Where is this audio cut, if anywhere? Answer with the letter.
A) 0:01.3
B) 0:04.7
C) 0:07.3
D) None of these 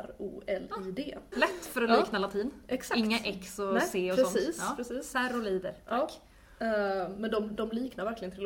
A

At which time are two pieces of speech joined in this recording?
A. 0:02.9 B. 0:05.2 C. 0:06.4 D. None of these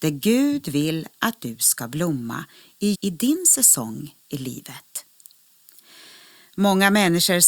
A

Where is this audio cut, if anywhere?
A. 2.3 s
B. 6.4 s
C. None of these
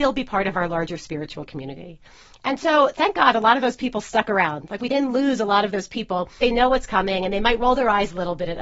B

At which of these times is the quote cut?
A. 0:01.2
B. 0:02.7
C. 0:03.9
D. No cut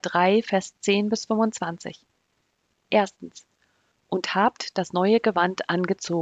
C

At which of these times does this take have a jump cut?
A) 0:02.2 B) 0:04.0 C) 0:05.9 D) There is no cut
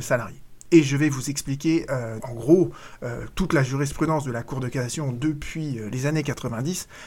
A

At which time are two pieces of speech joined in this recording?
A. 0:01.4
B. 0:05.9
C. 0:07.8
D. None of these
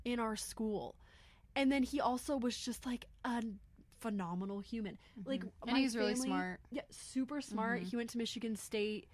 D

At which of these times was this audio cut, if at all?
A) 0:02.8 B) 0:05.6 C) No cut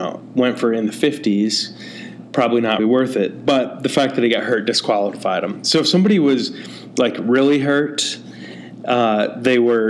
A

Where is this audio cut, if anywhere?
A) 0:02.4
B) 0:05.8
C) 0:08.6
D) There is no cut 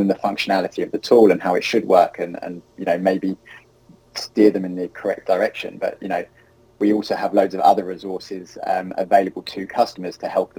D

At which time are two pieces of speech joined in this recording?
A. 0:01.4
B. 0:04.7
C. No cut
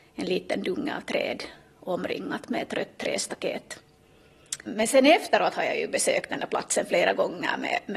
B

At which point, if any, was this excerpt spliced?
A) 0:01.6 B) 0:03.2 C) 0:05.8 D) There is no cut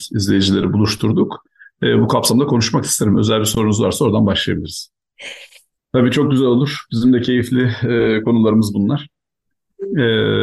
C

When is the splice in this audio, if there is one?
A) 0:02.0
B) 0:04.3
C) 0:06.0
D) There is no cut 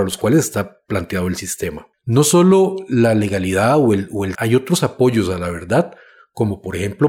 B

